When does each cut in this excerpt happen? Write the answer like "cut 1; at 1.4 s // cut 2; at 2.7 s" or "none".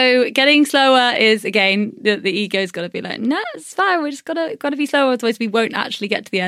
none